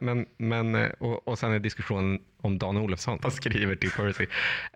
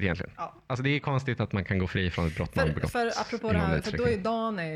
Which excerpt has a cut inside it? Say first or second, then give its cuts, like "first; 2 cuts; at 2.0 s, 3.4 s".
first; 2 cuts; at 0.9 s, 3.2 s